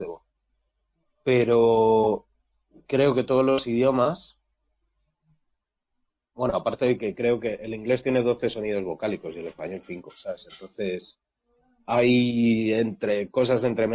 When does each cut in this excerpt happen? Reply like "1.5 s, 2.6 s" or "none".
none

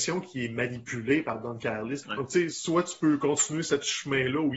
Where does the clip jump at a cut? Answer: 2.0 s

